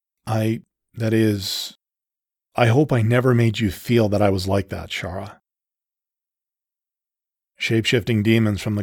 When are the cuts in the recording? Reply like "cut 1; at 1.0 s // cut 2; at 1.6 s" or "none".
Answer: cut 1; at 7.4 s